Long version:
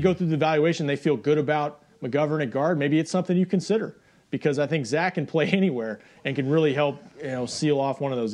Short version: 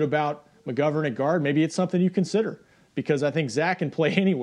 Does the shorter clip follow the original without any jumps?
yes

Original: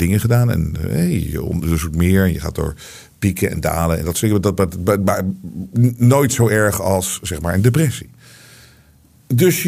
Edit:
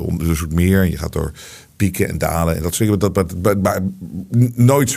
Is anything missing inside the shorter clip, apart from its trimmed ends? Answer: no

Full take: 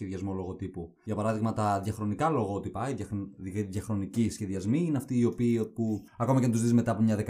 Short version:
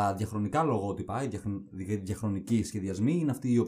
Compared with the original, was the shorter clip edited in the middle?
no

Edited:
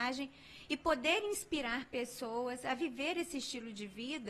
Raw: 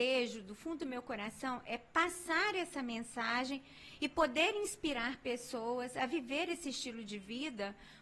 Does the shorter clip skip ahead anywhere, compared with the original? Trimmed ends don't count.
no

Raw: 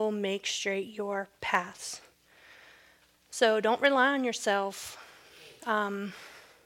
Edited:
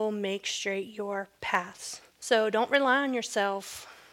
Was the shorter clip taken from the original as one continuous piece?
no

